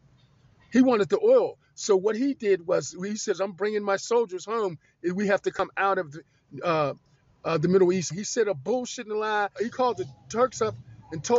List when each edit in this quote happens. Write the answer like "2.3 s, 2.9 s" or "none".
8.1 s, 9.6 s